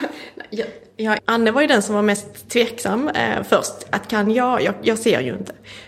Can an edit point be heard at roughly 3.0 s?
no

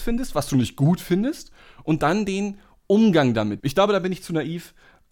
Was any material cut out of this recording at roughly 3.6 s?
yes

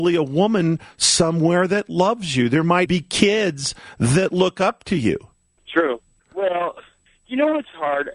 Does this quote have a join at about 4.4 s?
no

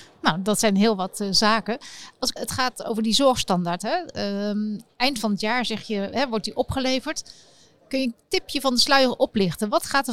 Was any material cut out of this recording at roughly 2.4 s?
yes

